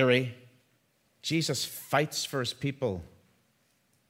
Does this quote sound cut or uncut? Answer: cut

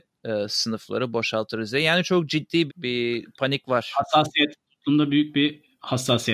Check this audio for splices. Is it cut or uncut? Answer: cut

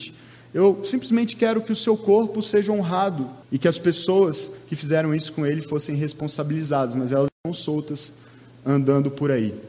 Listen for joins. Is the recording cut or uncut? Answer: cut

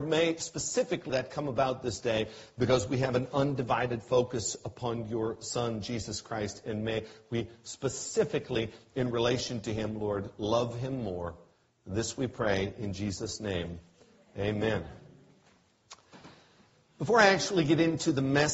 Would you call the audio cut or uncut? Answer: cut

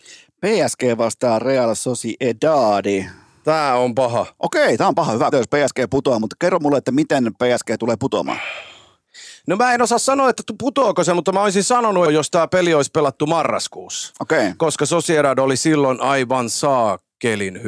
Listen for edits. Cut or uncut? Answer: cut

